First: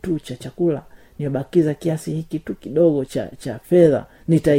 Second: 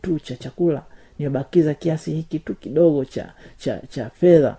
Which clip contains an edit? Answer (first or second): first